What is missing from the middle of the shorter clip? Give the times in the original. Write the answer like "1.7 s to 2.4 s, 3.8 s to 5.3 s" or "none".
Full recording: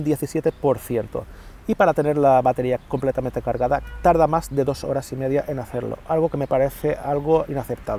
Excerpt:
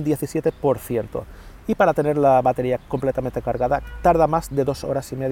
none